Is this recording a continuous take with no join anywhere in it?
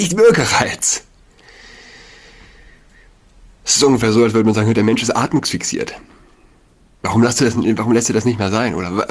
yes; 0 cuts

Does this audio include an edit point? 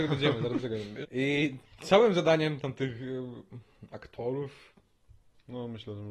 yes; 1 cut; at 1.0 s

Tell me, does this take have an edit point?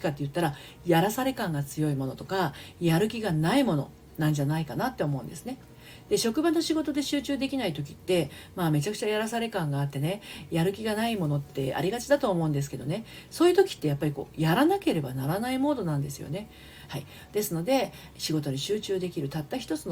yes; 2 cuts; at 16.9 s, 18.1 s

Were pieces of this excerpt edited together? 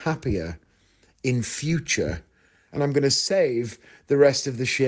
yes; 1 cut; at 2.7 s

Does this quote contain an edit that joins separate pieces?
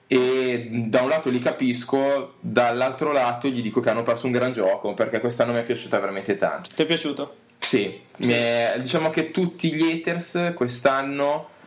yes; 1 cut; at 6.6 s

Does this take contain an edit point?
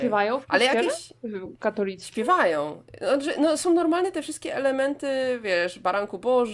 no; 0 cuts

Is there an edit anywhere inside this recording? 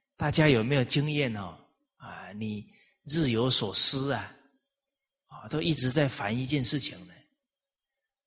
no; 0 cuts

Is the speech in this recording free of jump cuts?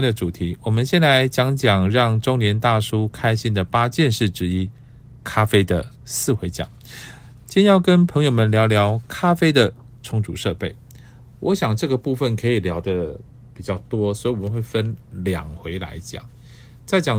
no; 1 cut; at 6.0 s

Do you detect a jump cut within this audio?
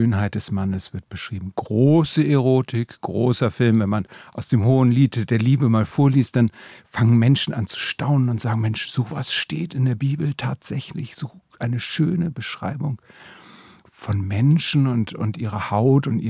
no; 0 cuts

